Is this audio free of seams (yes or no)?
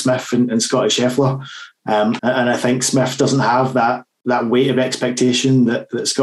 no